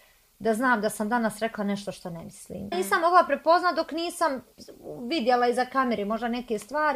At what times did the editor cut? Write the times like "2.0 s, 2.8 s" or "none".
2.7 s